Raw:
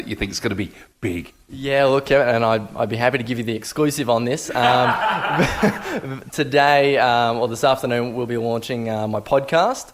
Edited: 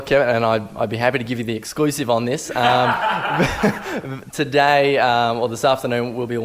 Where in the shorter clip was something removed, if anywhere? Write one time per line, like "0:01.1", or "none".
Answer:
none